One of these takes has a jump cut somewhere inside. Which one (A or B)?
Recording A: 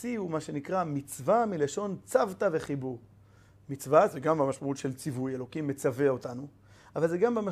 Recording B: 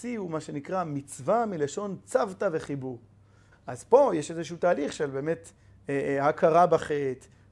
B